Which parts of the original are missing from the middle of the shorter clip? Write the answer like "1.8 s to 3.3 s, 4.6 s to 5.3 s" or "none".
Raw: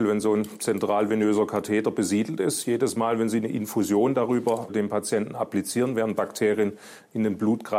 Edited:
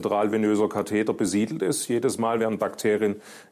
3.2 s to 5.9 s